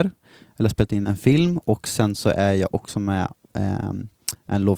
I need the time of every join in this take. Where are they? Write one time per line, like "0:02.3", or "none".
0:01.0